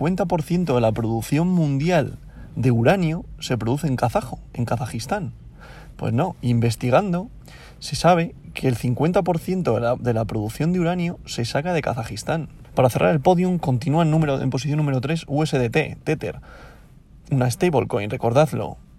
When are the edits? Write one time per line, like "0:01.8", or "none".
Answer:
0:05.9
0:12.6